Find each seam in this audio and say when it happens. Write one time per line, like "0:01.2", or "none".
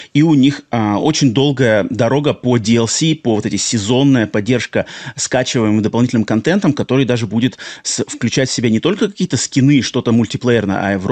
none